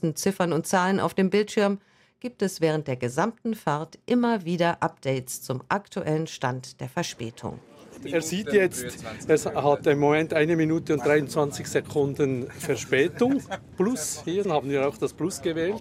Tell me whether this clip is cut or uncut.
cut